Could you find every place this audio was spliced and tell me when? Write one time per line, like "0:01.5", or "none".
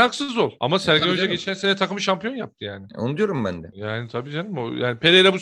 none